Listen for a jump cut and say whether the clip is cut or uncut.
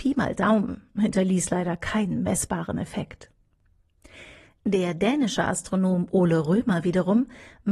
uncut